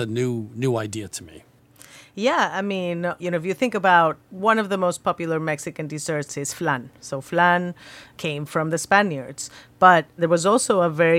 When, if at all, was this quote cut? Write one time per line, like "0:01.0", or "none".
none